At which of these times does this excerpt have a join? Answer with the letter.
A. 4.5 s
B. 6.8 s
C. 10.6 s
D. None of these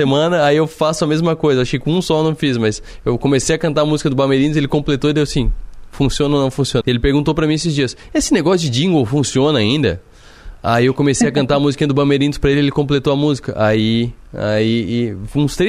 B